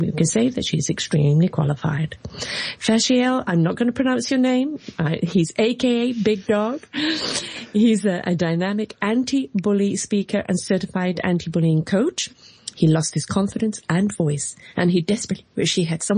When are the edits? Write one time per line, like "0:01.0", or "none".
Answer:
0:12.7